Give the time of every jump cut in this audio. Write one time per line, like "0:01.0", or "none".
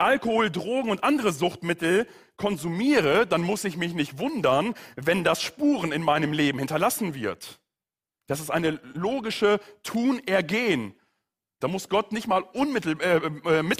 0:08.1
0:11.6